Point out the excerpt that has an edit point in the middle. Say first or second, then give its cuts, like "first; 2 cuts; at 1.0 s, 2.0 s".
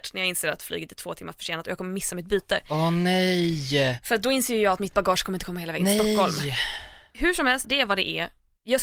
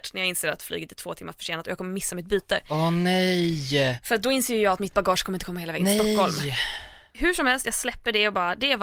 first; 1 cut; at 7.6 s